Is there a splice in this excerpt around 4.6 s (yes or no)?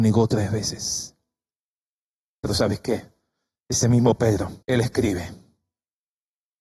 yes